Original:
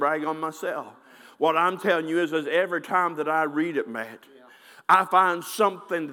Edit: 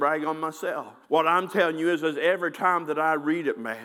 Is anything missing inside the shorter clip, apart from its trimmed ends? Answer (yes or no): yes